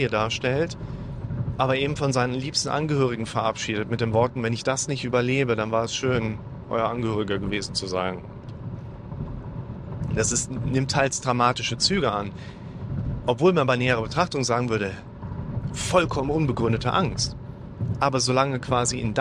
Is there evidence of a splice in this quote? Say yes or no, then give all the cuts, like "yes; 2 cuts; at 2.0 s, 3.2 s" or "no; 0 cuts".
no; 0 cuts